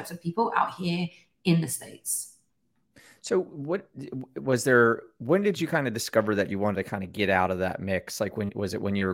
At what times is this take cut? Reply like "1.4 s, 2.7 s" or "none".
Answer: none